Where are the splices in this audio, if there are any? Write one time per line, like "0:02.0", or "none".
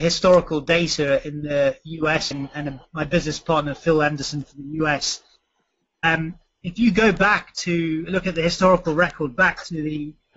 0:02.3